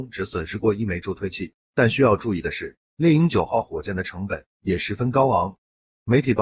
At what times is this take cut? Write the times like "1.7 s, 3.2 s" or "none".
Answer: 1.6 s